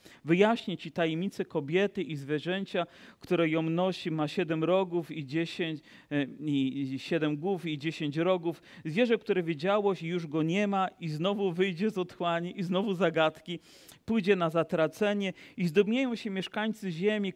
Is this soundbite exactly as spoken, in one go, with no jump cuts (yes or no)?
yes